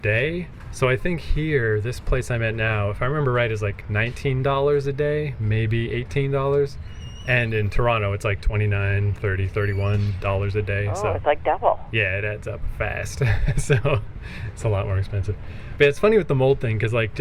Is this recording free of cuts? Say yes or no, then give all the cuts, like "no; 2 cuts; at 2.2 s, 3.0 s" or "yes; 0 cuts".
yes; 0 cuts